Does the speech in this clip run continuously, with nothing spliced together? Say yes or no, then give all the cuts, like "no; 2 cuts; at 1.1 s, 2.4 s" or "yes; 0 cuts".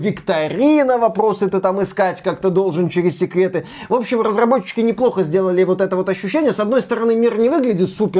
yes; 0 cuts